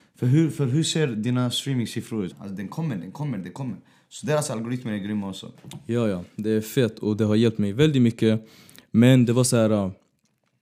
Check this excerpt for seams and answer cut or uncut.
cut